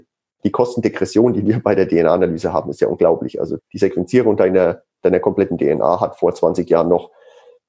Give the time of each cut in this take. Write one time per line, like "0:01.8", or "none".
0:03.6